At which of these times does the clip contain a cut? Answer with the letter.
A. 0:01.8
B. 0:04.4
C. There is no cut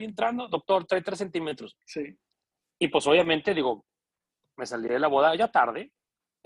A